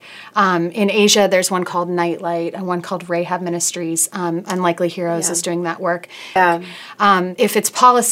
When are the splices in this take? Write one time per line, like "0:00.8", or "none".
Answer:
0:06.4